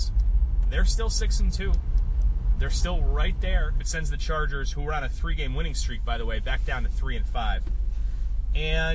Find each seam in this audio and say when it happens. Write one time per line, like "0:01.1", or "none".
0:03.8